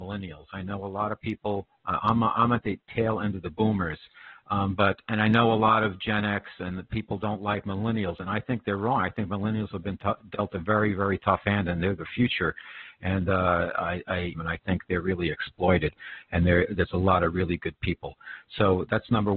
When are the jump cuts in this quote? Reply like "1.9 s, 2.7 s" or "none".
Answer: 5.1 s, 14.3 s